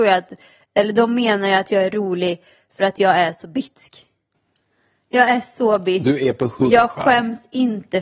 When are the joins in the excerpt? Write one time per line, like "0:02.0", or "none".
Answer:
none

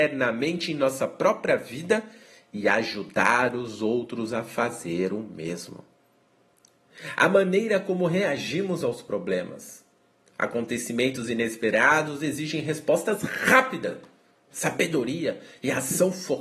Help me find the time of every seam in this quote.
0:14.5

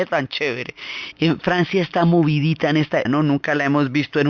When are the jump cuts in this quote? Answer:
0:01.1
0:03.1

